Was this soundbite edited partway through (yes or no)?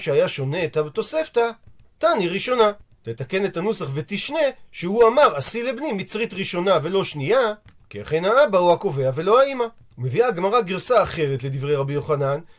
no